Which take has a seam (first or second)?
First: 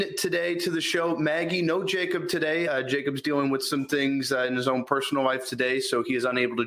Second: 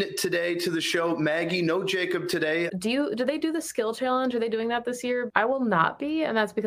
second